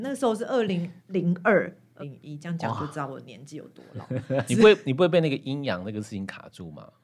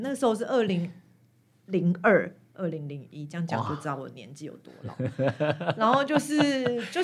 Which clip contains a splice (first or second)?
first